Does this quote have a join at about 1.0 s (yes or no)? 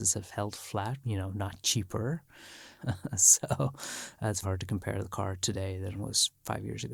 yes